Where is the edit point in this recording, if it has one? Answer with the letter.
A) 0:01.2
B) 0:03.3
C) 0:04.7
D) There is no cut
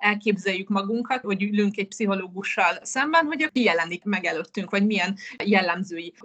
A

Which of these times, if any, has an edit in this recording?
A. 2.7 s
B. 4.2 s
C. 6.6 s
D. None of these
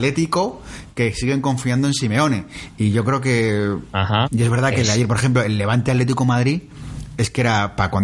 B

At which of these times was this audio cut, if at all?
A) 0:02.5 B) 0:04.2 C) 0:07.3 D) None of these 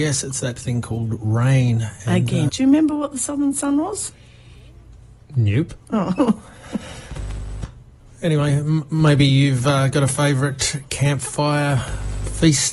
A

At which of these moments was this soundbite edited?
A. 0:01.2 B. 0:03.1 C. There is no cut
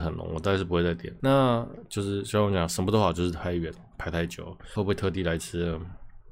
A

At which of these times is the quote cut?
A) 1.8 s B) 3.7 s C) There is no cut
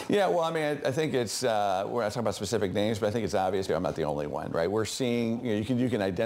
B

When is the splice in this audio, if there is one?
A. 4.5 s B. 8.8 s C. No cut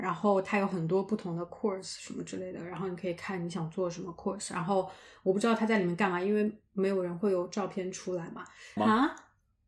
B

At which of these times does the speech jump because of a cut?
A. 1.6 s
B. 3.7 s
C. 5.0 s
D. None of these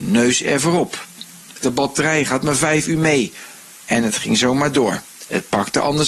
A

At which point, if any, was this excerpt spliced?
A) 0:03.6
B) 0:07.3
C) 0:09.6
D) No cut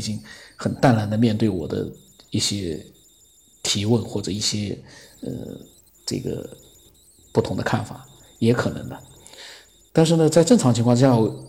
D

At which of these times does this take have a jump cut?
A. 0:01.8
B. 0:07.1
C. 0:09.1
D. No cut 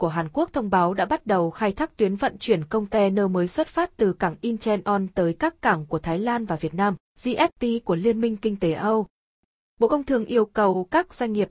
B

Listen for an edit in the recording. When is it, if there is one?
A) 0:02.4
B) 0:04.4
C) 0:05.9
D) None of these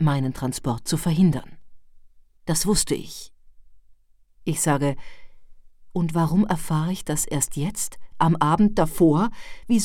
B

